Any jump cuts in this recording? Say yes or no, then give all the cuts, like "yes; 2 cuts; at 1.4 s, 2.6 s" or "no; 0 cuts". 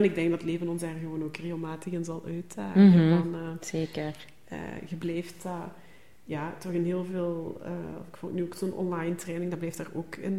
no; 0 cuts